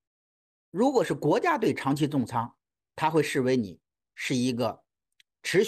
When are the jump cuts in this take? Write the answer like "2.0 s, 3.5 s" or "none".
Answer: none